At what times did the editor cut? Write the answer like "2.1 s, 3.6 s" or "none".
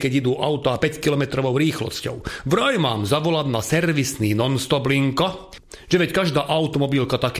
none